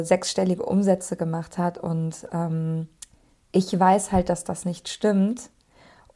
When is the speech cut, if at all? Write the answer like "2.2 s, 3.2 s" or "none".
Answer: none